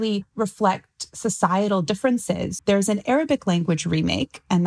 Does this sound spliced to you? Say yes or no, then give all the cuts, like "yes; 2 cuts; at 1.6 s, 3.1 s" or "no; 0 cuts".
yes; 1 cut; at 2.6 s